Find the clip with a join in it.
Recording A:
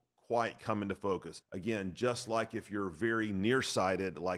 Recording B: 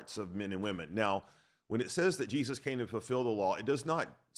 A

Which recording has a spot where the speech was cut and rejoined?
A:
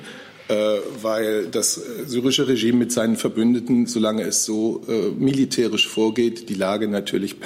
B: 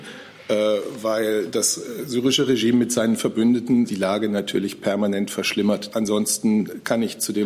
B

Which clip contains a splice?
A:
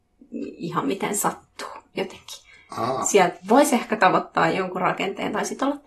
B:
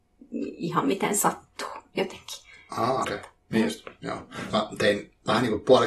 B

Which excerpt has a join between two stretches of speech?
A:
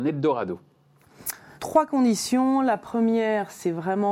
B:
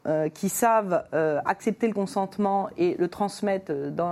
A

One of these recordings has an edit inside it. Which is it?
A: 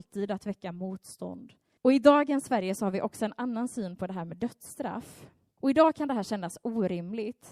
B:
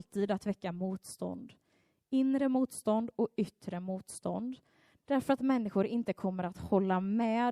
A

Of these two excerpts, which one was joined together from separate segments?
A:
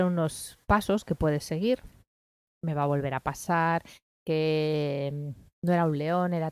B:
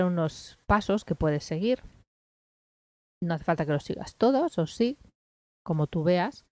A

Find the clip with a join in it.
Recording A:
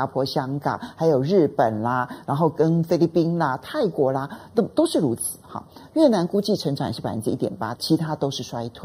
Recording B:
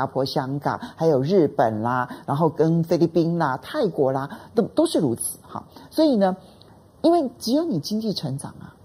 A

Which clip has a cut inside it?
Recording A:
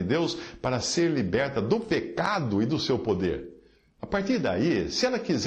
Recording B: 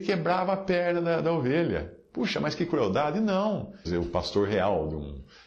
B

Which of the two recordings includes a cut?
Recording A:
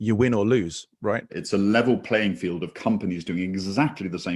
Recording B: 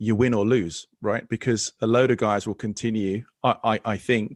A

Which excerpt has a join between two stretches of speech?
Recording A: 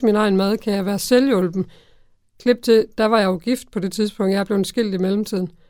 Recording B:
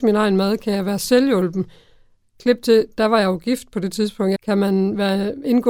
B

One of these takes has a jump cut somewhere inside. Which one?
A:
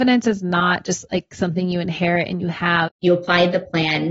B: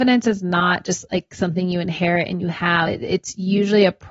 A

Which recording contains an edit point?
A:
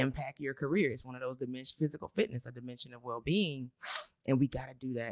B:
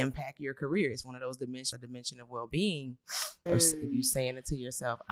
B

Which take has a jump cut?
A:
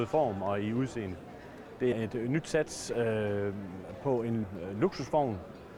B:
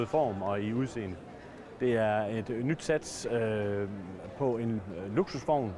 A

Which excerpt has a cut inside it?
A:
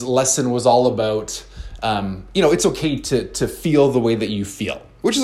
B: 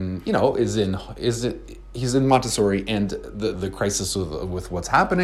B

